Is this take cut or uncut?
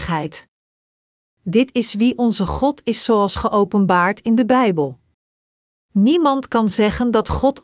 cut